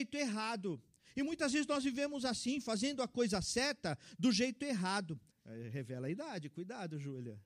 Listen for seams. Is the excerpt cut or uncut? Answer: cut